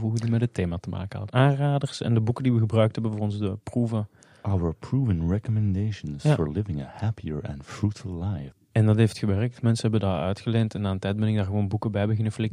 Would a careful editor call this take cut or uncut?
cut